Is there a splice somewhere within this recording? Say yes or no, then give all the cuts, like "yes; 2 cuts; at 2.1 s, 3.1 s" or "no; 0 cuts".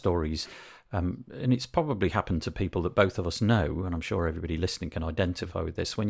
no; 0 cuts